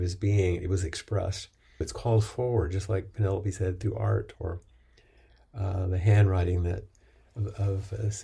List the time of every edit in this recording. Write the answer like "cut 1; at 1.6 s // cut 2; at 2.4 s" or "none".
cut 1; at 1.8 s